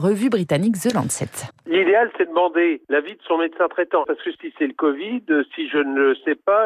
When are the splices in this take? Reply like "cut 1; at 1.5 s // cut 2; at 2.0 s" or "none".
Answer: cut 1; at 1.5 s